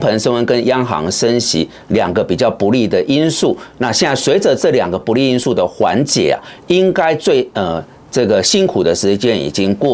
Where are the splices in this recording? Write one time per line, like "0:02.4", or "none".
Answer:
none